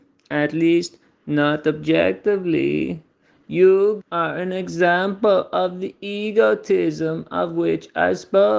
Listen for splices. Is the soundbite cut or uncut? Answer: cut